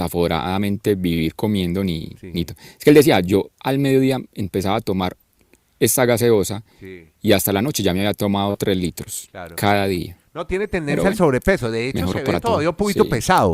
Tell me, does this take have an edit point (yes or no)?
no